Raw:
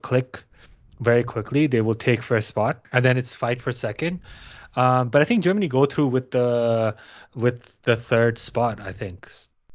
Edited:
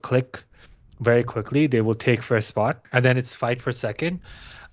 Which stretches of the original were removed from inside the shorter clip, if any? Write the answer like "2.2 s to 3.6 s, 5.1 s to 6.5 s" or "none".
none